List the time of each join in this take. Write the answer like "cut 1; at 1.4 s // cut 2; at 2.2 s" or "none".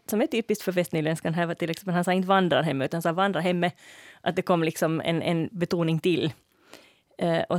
none